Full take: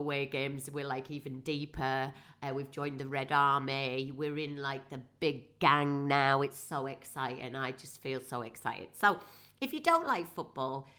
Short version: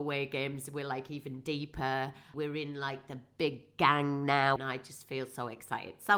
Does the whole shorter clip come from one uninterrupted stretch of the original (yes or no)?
no